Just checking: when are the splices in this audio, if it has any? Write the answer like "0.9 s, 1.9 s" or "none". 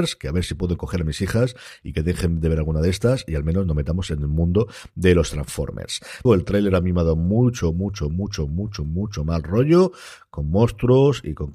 6.3 s

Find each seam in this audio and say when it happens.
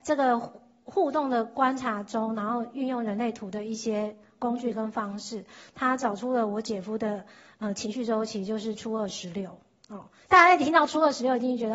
none

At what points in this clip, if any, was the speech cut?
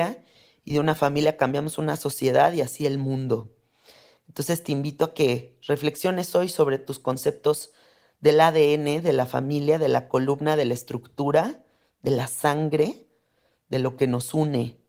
none

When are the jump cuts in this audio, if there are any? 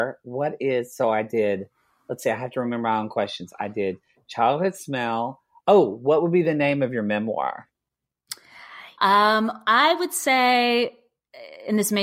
9.0 s

